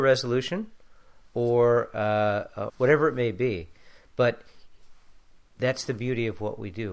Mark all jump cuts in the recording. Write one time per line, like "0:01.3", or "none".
0:02.7